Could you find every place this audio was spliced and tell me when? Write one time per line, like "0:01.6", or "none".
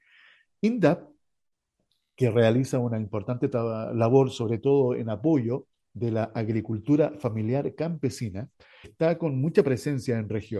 0:08.8

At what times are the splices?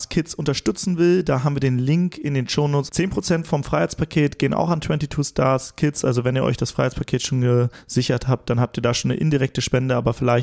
0:02.9

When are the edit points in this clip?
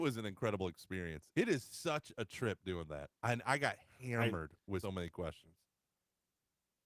0:03.2
0:04.8

